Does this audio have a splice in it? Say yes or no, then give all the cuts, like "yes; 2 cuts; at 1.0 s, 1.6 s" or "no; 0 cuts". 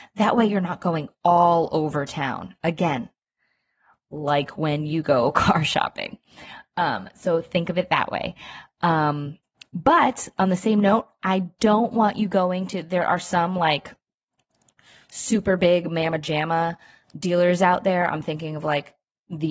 no; 0 cuts